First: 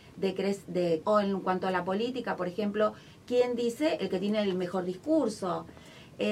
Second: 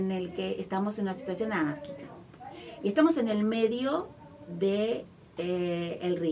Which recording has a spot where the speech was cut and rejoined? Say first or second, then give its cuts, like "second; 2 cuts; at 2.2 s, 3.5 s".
first; 1 cut; at 1.0 s